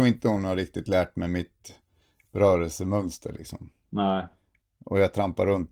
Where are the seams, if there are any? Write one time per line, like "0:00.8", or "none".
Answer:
none